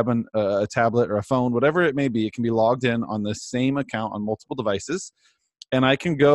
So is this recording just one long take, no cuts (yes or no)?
yes